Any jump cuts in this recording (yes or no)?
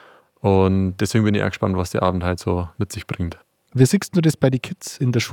no